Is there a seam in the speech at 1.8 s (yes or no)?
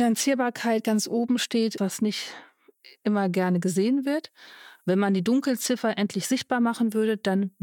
yes